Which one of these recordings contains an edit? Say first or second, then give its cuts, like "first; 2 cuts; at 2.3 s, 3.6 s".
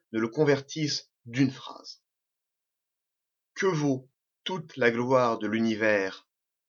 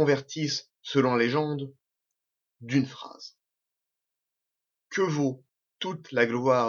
first; 1 cut; at 1.1 s